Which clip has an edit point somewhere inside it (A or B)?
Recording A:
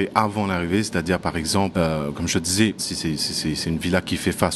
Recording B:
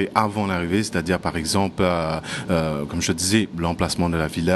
A